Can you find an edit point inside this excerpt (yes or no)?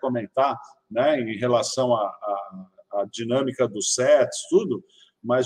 no